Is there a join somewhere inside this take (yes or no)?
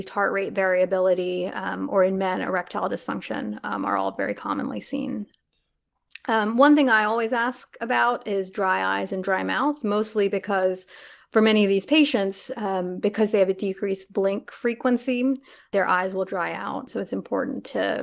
no